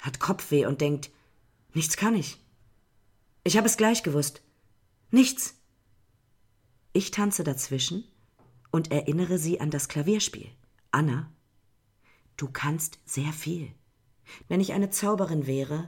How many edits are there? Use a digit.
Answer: 2